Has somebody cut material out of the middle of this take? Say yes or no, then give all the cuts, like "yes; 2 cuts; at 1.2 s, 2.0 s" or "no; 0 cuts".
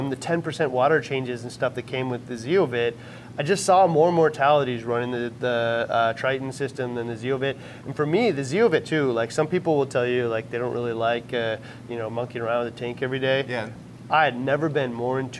no; 0 cuts